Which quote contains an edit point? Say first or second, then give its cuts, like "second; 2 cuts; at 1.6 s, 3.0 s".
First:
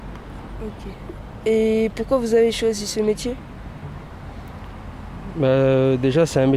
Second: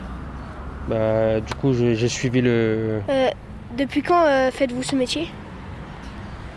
second; 1 cut; at 3.1 s